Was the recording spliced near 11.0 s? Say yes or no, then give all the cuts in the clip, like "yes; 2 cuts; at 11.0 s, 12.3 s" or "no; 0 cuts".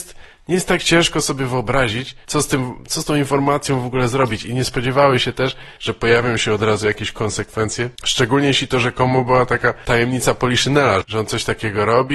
yes; 3 cuts; at 2.2 s, 5.8 s, 11.0 s